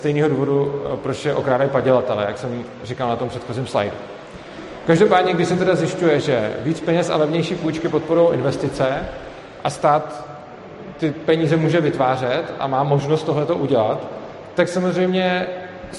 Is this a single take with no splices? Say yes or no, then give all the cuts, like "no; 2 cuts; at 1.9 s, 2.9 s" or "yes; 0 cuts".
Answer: yes; 0 cuts